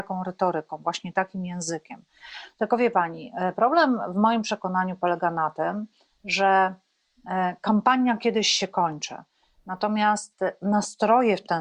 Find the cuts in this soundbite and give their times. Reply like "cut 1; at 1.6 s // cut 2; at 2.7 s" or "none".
none